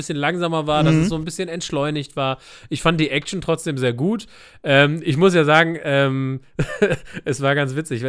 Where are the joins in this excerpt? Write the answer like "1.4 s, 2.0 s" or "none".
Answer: none